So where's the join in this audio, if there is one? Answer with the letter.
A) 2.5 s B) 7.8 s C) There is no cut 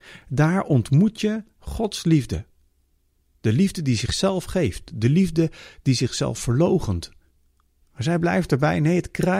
B